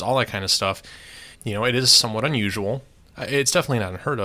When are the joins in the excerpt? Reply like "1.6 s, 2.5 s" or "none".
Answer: 1.3 s